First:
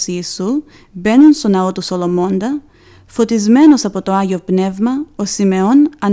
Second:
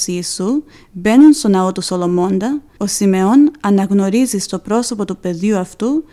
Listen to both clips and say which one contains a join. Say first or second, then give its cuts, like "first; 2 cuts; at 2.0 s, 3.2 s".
second; 1 cut; at 2.8 s